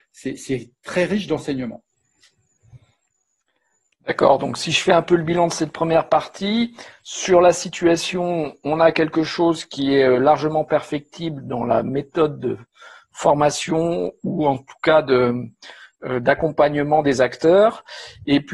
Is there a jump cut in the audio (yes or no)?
no